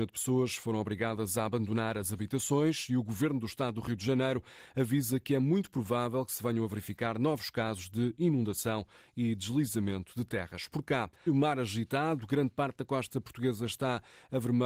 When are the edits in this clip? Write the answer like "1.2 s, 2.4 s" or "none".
11.3 s

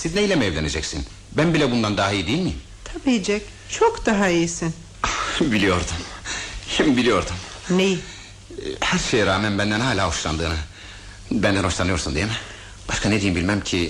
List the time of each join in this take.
12.8 s

